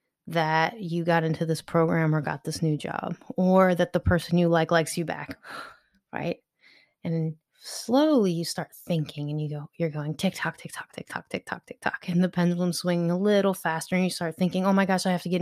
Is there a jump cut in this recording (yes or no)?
no